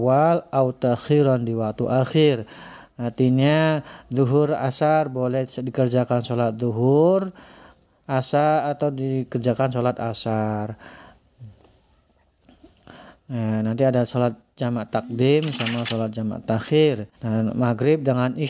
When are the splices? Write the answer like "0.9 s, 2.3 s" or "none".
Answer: 17.2 s